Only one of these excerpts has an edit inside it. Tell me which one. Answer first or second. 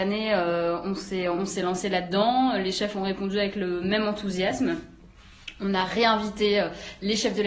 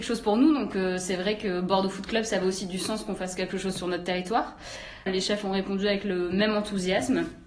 second